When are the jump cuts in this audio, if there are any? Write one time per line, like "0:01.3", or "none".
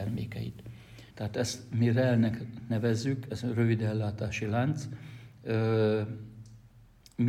0:01.1